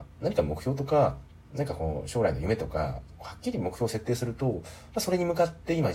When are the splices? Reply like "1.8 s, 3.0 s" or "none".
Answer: none